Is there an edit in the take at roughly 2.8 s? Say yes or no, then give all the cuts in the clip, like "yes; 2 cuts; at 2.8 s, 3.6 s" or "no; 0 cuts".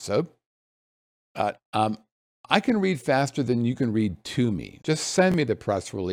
no; 2 cuts; at 1.5 s, 4.8 s